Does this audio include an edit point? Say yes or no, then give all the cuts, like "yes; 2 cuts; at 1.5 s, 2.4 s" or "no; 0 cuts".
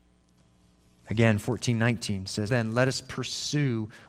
yes; 1 cut; at 2.5 s